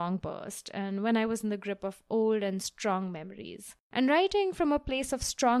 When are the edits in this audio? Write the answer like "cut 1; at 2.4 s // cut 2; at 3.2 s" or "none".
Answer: cut 1; at 3.8 s